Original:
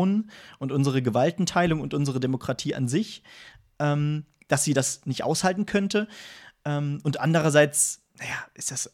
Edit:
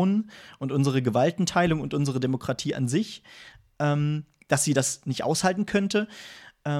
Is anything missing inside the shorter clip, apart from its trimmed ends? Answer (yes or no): no